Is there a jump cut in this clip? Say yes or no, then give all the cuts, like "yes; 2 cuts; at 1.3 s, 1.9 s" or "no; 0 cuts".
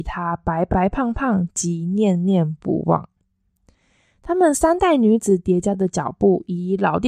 no; 0 cuts